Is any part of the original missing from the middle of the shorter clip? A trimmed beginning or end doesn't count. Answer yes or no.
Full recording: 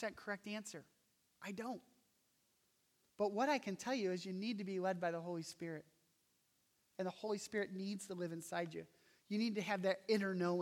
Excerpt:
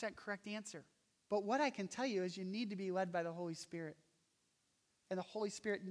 yes